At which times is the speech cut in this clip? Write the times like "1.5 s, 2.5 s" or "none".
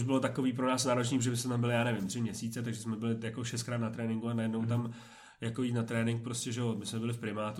none